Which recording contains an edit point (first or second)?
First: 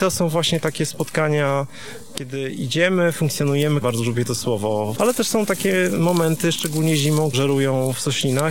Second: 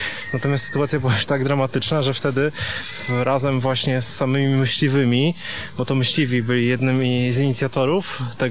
first